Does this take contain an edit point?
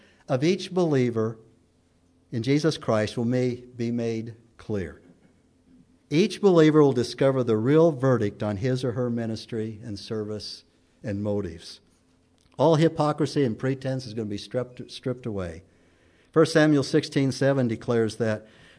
no; 0 cuts

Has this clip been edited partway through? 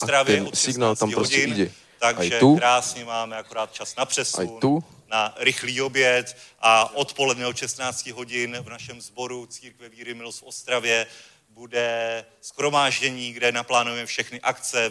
no; 0 cuts

